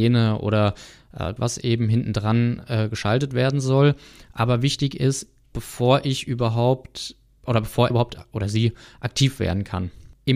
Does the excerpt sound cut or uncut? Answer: cut